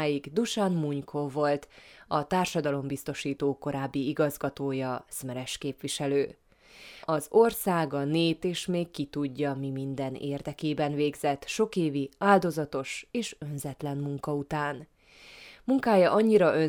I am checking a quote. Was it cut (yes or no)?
yes